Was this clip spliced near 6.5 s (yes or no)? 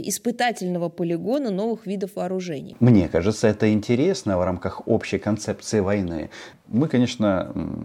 yes